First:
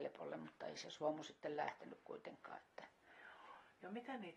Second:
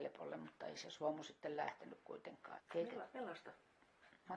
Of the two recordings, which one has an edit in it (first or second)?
second